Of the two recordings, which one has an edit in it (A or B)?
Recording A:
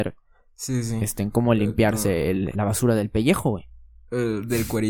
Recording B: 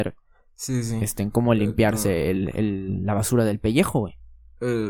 A